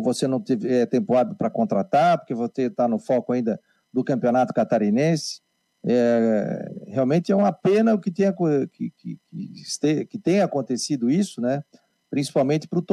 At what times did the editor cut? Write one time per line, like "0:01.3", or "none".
none

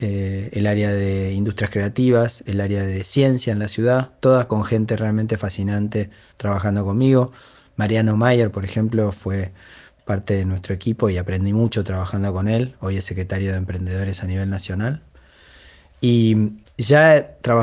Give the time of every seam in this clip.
none

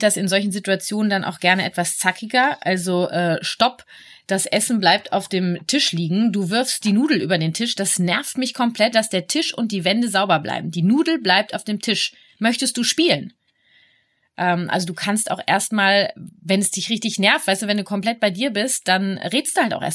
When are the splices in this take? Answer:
0:08.9

